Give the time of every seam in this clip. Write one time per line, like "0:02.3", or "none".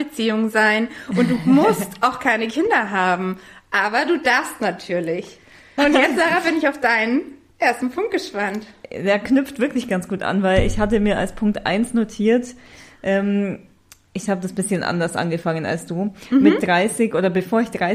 0:05.8